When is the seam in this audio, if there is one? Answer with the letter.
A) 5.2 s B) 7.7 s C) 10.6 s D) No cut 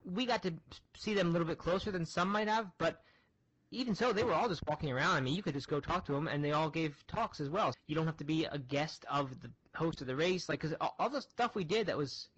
B